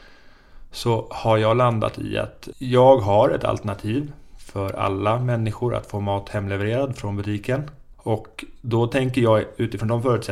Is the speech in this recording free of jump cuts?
no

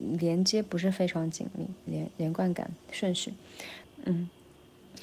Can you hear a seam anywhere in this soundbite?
yes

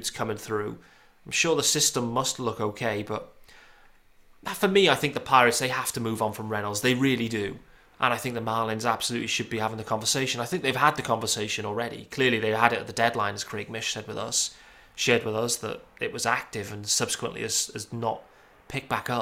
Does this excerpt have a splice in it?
no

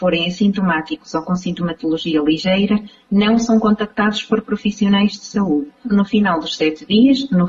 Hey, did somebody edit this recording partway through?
yes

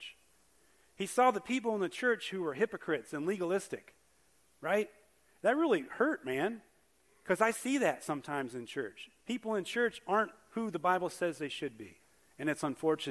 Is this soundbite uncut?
yes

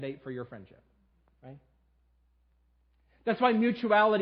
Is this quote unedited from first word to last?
yes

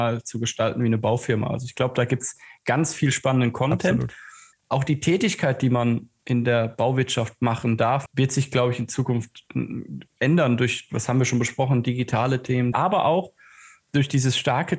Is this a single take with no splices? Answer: no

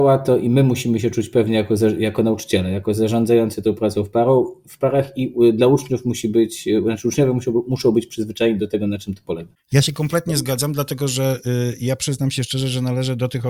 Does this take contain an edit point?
no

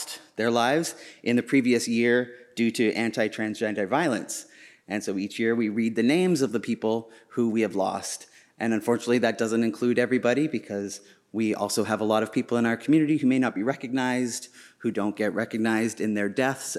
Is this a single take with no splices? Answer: yes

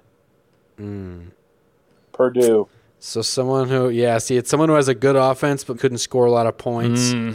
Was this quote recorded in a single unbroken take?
no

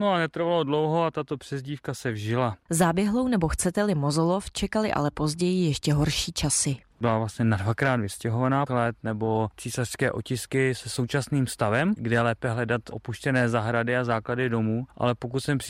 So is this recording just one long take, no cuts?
no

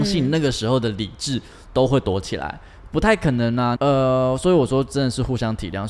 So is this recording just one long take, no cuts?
no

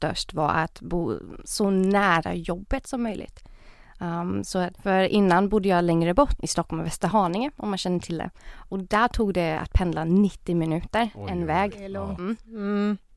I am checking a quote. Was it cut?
yes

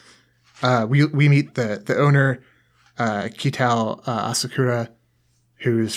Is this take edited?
no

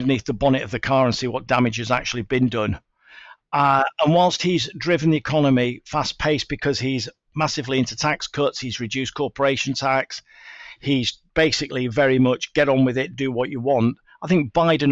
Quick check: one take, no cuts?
yes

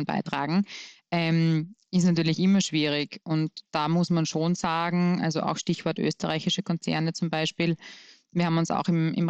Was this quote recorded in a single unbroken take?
yes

